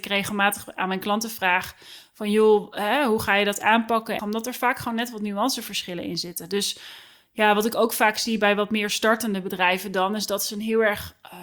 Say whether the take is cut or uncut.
cut